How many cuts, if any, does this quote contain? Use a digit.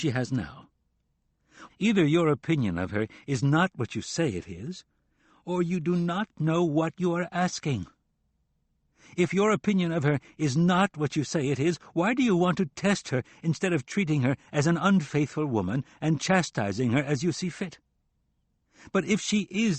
1